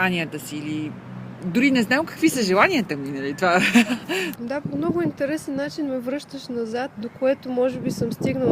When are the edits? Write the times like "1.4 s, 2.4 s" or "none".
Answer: 4.4 s, 6.9 s